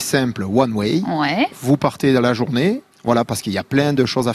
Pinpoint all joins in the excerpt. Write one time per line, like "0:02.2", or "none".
0:01.5
0:02.9